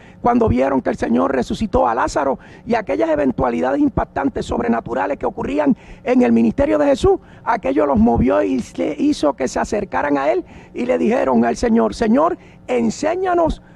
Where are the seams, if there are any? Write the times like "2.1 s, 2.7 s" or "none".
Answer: none